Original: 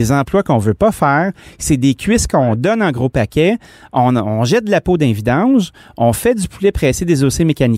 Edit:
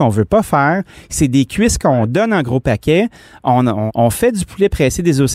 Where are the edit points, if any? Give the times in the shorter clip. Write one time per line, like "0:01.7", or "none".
0:03.9

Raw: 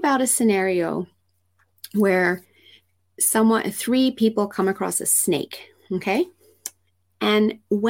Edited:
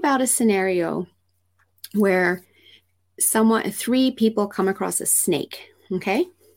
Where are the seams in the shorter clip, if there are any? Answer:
none

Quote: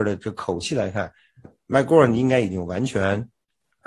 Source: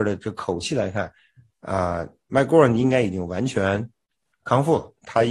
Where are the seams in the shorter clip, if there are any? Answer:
0:01.4

